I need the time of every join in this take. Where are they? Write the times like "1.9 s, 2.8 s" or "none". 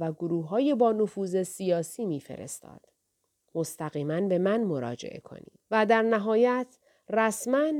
5.6 s